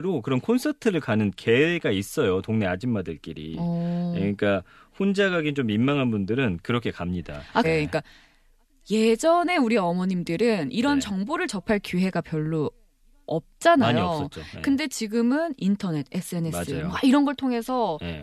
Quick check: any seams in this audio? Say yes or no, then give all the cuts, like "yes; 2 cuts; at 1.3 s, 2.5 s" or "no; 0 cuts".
yes; 1 cut; at 7.6 s